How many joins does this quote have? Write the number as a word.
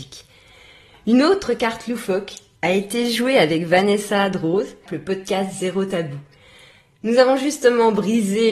one